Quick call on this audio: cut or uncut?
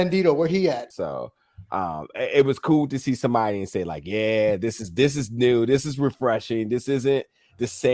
cut